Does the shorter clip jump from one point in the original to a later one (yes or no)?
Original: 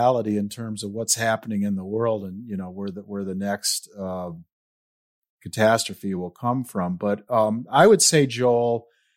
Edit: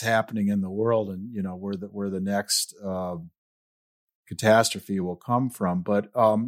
no